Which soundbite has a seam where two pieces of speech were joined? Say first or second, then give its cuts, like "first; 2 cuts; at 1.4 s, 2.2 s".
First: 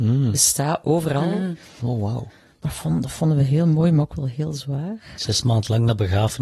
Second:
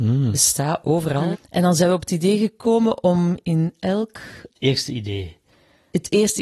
second; 2 cuts; at 1.3 s, 4.6 s